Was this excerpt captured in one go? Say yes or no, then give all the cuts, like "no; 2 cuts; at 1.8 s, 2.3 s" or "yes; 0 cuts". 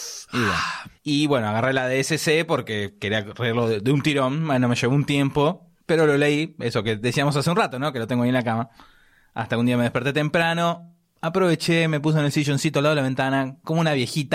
yes; 0 cuts